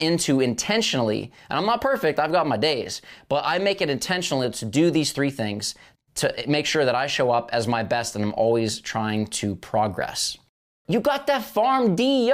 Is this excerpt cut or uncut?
cut